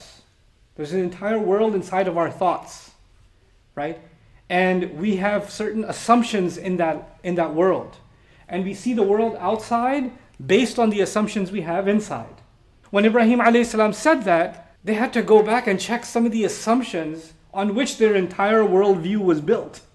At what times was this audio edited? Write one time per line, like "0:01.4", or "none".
0:12.8
0:14.7